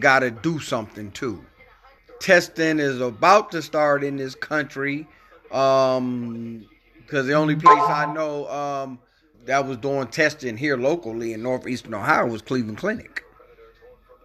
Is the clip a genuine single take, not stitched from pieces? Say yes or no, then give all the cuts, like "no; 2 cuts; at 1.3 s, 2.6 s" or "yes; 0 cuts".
no; 2 cuts; at 2.0 s, 9.3 s